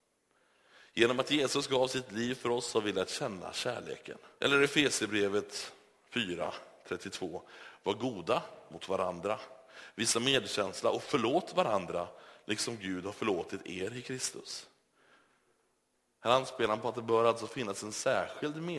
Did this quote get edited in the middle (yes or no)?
yes